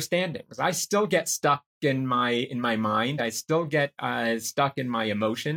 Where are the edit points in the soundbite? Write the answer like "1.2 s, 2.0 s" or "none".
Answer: none